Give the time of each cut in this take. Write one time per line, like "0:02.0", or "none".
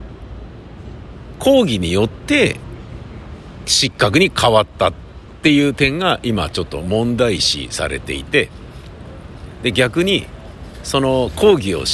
0:03.6

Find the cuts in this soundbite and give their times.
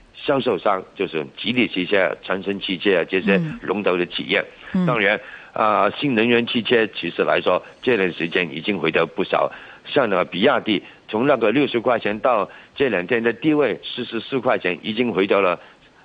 none

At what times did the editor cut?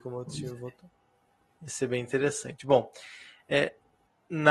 none

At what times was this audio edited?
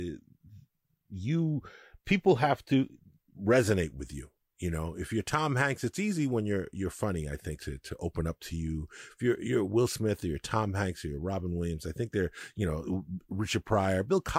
0:07.6

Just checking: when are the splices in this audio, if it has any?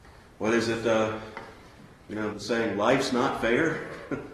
0:02.3

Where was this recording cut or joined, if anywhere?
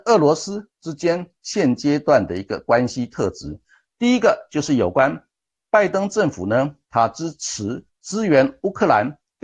none

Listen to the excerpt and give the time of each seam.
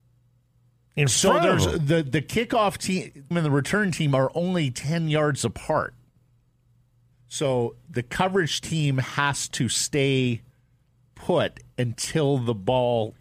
0:03.3
0:07.1

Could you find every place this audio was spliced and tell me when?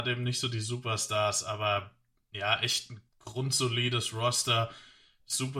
0:03.1

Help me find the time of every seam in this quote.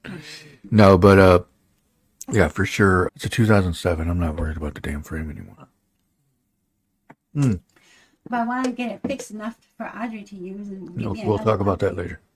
0:03.1

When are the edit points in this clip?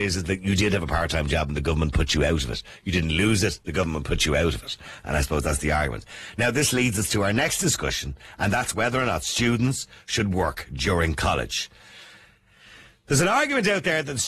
none

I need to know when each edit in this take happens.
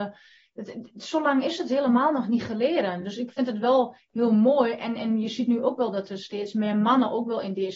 none

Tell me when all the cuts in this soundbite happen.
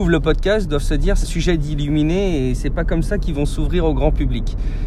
0:01.2

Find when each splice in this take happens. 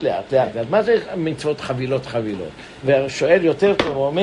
0:02.8

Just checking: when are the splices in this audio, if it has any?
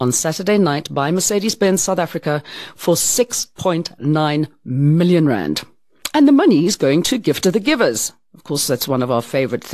none

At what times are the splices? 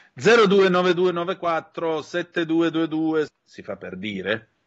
0:03.3

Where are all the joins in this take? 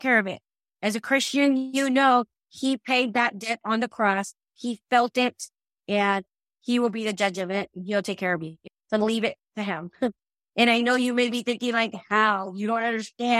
0:05.8

